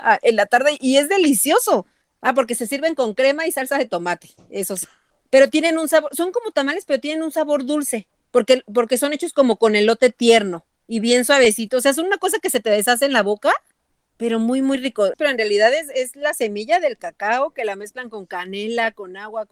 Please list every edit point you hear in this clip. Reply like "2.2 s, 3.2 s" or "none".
15.1 s